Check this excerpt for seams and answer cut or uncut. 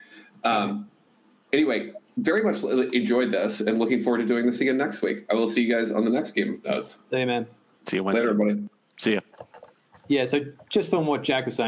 uncut